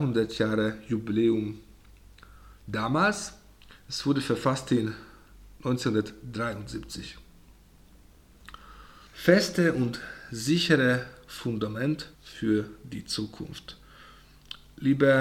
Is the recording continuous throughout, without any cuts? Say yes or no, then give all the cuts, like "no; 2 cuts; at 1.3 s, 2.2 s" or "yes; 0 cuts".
no; 2 cuts; at 9.1 s, 12.1 s